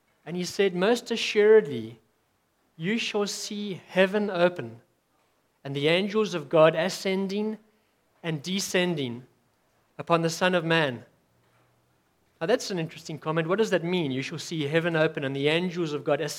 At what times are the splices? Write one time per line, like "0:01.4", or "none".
none